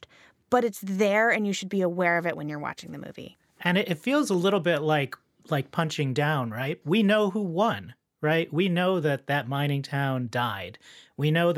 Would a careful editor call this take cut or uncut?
cut